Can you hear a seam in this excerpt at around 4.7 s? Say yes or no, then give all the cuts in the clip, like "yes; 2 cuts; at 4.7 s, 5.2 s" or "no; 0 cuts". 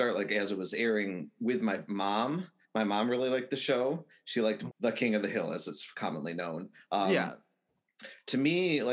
yes; 1 cut; at 4.7 s